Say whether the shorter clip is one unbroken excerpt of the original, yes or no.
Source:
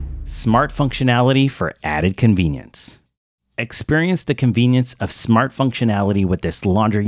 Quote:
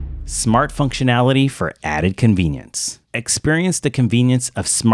no